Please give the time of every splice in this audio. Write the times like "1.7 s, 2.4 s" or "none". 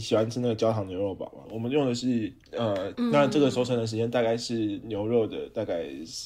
1.4 s, 2.9 s